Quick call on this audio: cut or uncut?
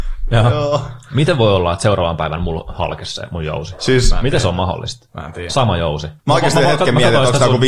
cut